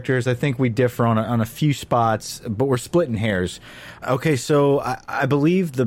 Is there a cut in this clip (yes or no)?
yes